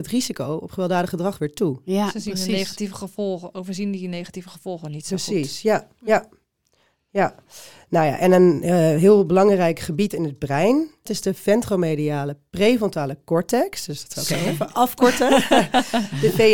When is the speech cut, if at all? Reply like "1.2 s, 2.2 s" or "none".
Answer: 11.1 s